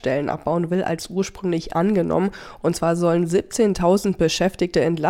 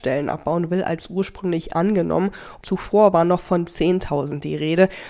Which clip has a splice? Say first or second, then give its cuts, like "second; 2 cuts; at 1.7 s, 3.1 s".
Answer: second; 1 cut; at 2.6 s